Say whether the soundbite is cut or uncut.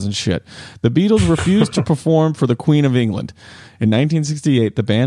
uncut